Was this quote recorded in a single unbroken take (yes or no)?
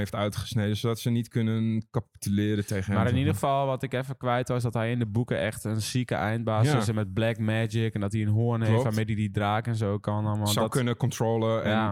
yes